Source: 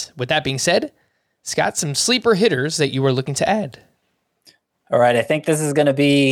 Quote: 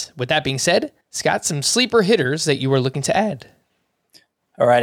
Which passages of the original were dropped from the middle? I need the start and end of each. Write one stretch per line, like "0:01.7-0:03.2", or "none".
0:01.0-0:01.3